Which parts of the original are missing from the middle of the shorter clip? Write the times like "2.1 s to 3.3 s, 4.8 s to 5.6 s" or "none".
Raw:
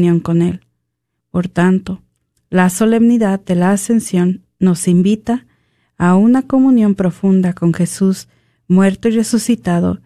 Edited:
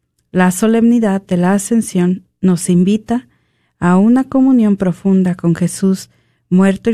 none